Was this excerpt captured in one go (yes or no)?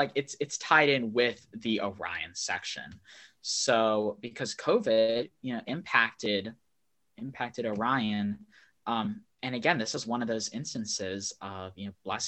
yes